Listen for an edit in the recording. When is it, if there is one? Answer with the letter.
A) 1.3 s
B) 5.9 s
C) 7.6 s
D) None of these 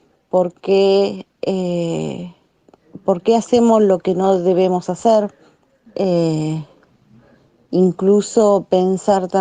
B